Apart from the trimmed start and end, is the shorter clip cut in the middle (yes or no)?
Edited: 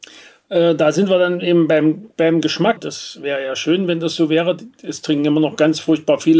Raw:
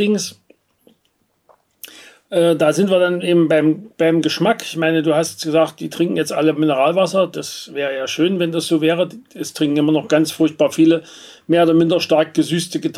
yes